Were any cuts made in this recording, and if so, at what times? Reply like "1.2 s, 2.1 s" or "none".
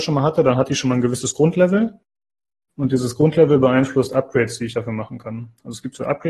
none

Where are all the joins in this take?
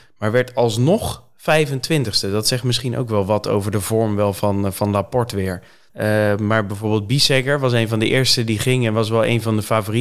5.9 s

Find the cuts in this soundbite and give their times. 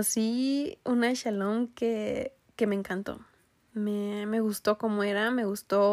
none

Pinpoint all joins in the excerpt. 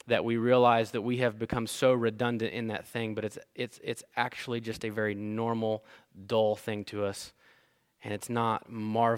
none

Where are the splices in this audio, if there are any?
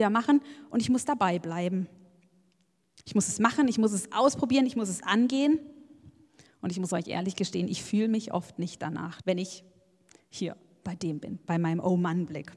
9.2 s

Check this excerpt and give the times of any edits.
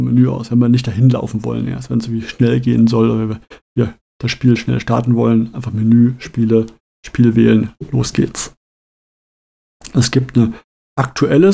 none

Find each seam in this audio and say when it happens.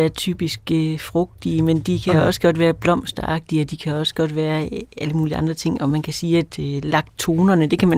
none

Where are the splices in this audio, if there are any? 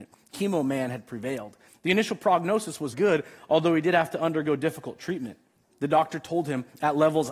1.7 s, 2.9 s, 5.6 s

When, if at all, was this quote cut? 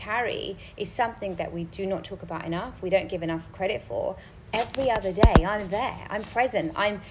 4.5 s

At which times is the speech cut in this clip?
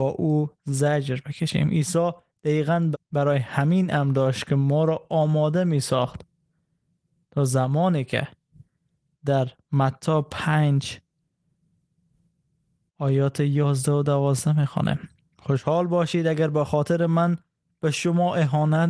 2.9 s

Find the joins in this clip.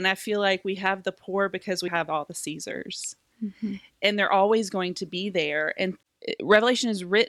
1.9 s

